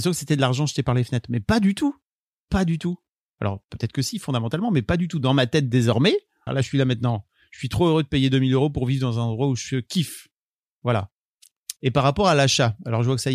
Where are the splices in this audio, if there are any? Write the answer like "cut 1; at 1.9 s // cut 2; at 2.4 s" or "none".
cut 1; at 6.5 s // cut 2; at 11.8 s